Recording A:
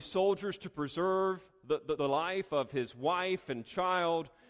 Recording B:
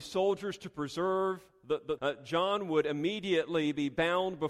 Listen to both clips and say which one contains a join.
B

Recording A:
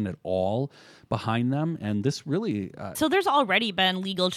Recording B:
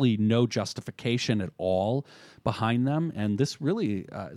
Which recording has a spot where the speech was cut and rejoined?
A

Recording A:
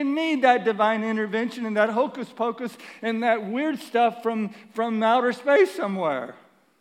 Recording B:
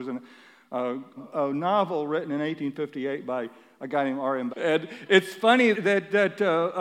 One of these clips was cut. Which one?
B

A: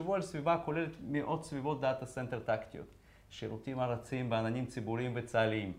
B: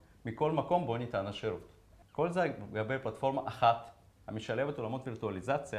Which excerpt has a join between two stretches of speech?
B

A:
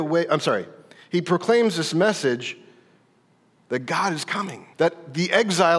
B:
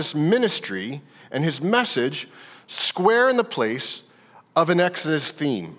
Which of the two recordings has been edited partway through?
A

